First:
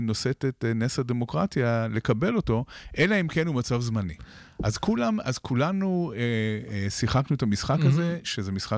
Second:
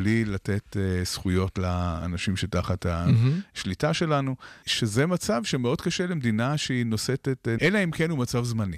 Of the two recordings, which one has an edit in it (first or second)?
second